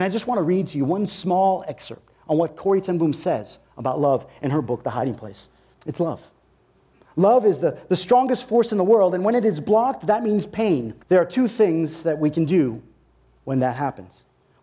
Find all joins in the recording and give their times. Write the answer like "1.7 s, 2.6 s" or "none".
5.7 s, 11.0 s